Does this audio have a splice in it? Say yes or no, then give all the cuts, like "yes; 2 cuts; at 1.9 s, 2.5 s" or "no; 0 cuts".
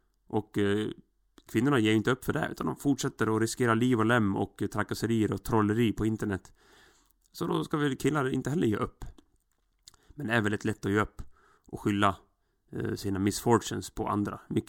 no; 0 cuts